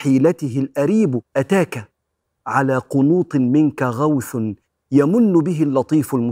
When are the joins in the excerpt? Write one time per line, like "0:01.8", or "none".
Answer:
0:01.3